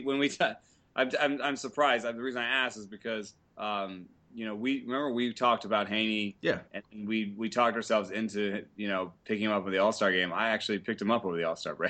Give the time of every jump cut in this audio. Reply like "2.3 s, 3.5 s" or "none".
none